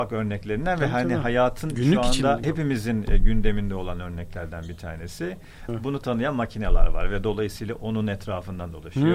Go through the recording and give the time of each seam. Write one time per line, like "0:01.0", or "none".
0:02.4
0:05.7